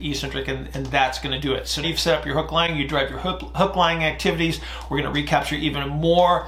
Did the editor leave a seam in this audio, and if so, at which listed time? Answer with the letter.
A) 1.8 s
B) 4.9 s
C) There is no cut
A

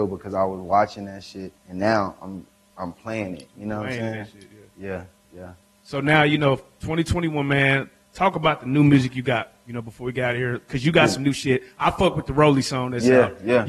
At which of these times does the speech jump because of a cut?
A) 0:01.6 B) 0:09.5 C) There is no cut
A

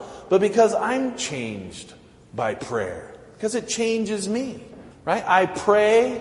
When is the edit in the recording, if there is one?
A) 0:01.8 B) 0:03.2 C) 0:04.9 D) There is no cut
C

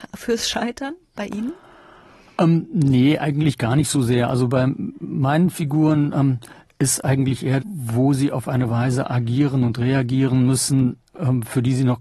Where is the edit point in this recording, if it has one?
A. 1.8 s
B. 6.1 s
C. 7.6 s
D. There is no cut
C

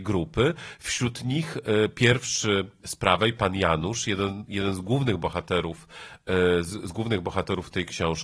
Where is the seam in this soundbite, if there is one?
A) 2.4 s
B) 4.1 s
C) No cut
C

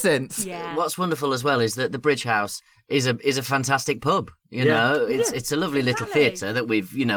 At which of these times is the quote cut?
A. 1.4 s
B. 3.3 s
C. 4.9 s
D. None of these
D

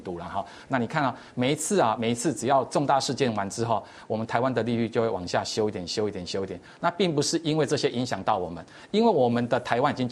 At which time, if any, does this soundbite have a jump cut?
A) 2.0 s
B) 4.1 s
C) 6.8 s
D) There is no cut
D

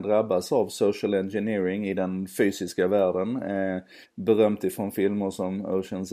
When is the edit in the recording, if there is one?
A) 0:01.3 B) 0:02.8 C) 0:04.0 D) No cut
C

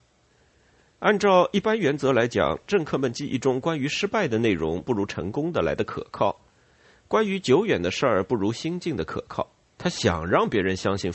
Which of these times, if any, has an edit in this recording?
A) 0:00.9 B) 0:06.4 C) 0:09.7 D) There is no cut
C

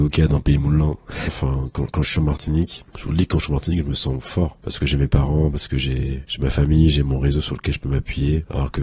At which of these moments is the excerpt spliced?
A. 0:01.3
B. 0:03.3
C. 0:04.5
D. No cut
A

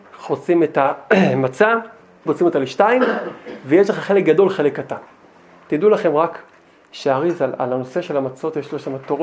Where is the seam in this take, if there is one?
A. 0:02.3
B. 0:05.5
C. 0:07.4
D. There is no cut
A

